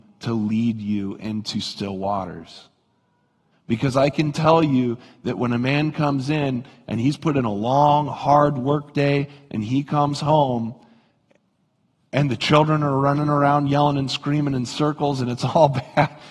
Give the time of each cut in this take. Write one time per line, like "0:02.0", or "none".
0:03.5